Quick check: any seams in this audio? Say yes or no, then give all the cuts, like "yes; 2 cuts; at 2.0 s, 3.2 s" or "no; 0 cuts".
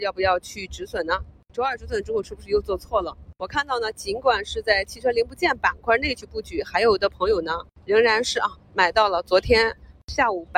yes; 1 cut; at 2.2 s